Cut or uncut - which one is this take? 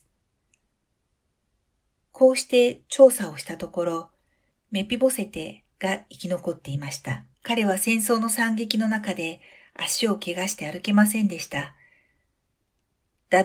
cut